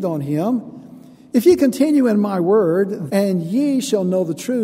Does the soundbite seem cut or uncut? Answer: cut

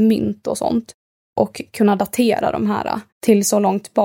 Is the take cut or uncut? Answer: cut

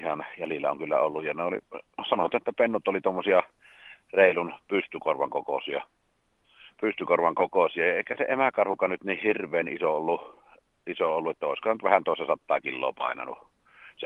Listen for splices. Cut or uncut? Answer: uncut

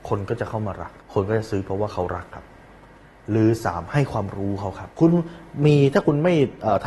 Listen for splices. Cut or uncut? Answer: cut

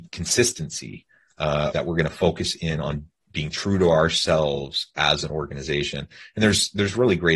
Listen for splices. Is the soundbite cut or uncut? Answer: cut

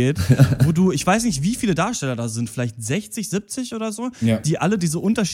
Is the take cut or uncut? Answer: uncut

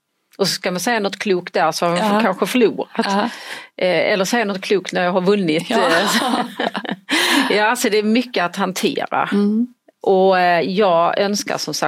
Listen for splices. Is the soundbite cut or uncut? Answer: uncut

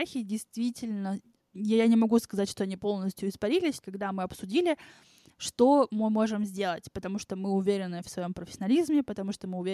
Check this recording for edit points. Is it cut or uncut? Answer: cut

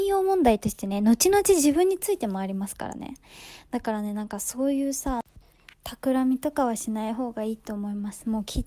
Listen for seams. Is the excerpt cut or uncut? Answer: uncut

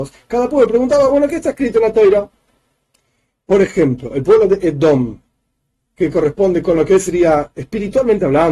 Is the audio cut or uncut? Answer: uncut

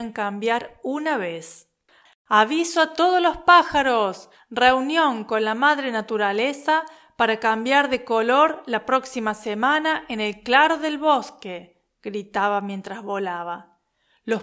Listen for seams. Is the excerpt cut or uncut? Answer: cut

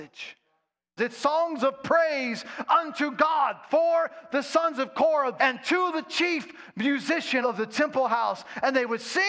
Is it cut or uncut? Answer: cut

